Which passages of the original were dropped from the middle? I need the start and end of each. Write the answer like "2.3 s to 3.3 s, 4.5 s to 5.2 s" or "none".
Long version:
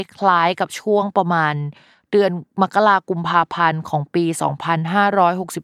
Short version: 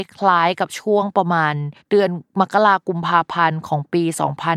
1.8 s to 2.0 s